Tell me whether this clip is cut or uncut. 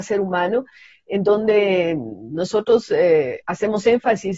uncut